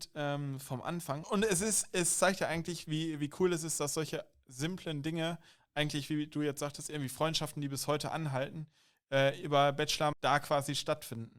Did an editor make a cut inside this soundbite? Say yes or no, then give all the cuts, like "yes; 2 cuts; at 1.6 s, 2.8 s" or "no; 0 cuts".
yes; 2 cuts; at 1.2 s, 10.1 s